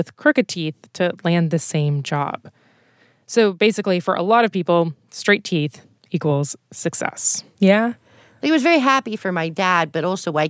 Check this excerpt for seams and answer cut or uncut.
cut